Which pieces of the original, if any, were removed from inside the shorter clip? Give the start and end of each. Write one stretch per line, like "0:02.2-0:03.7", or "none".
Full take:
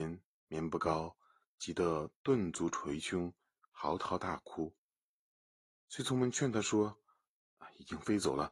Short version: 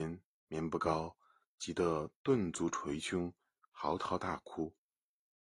none